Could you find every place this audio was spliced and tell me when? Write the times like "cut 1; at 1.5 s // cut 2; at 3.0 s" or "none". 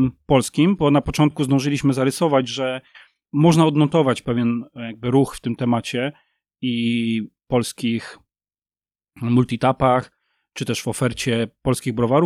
none